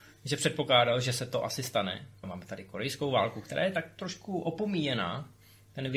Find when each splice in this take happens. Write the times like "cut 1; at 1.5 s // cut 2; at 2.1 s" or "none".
cut 1; at 2.2 s